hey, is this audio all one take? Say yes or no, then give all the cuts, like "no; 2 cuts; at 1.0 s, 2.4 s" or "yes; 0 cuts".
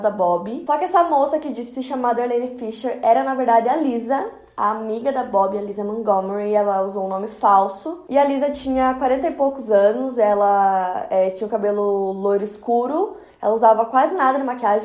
yes; 0 cuts